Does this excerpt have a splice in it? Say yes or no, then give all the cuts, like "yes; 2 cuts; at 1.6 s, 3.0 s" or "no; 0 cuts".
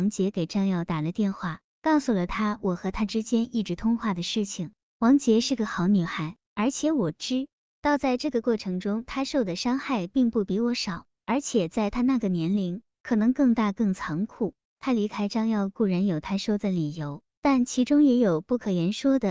yes; 1 cut; at 6.5 s